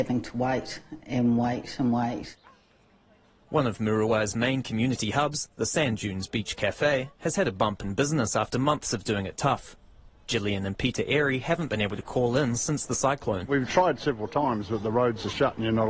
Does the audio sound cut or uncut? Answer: uncut